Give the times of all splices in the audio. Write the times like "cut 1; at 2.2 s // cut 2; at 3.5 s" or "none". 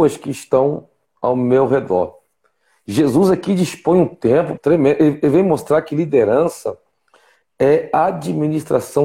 cut 1; at 4.6 s